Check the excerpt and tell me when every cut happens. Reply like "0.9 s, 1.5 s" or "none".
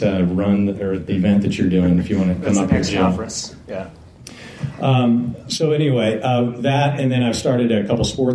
1.0 s